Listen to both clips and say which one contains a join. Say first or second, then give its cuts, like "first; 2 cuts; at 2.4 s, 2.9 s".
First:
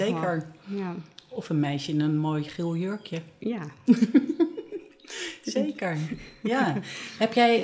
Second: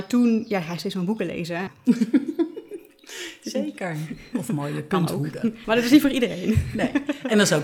second; 3 cuts; at 1.7 s, 4.3 s, 5.6 s